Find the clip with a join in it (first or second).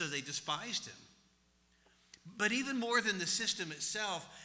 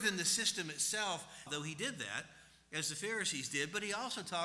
second